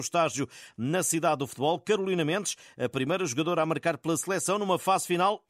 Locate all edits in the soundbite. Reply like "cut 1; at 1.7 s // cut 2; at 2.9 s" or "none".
none

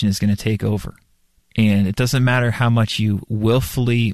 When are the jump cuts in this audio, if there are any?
none

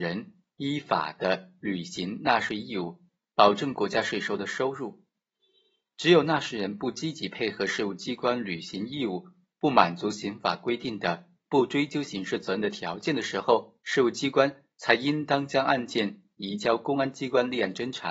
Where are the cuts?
cut 1; at 13.8 s

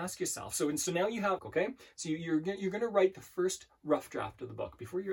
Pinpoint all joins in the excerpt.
cut 1; at 1.4 s

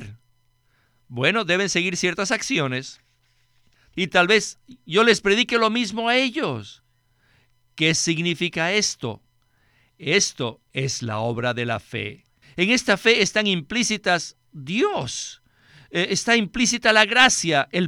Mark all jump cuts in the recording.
cut 1; at 3.9 s // cut 2; at 12.4 s

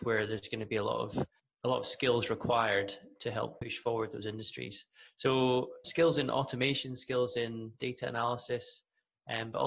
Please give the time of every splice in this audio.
cut 1; at 5.8 s

